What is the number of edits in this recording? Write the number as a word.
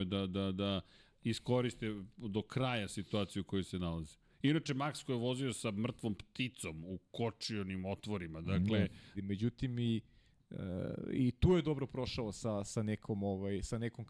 one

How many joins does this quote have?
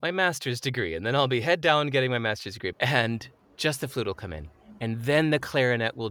one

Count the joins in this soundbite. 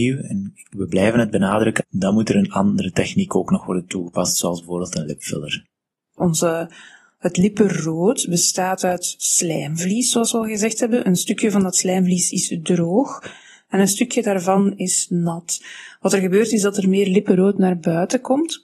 two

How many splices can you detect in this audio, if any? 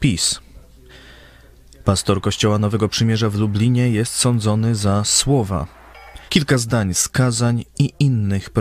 two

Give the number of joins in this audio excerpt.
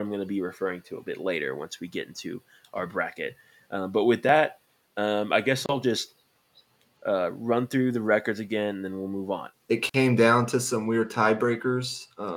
one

